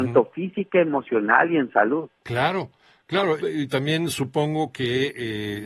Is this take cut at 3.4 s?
yes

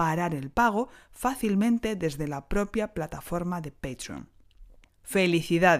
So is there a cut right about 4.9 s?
yes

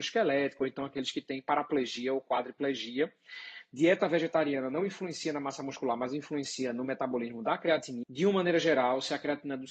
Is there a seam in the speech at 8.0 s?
yes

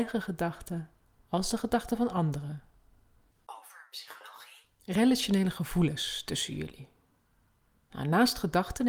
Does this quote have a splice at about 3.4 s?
no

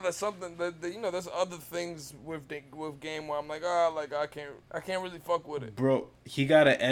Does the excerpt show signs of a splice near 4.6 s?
yes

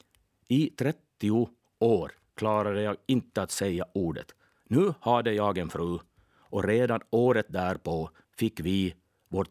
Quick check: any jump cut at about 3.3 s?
no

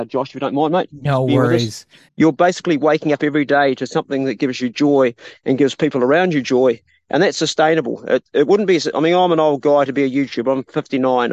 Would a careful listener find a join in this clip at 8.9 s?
no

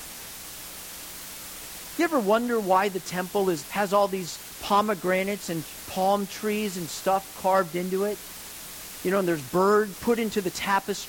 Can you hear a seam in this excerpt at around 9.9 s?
yes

